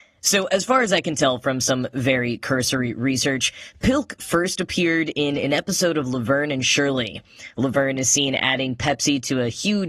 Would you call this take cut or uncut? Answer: uncut